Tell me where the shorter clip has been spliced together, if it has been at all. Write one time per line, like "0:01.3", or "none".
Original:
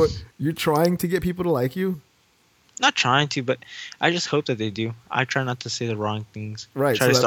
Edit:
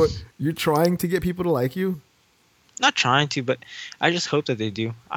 none

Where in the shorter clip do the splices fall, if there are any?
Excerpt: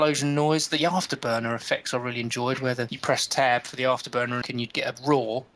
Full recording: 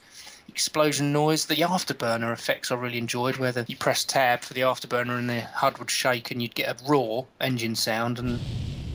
0:04.4

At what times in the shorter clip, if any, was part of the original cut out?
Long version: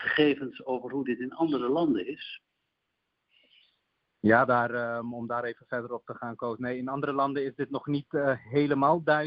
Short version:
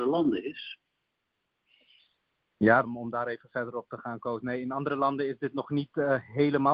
0:02.8

